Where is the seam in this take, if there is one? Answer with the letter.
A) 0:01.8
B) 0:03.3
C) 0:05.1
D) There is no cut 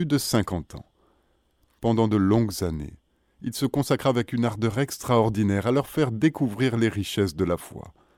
A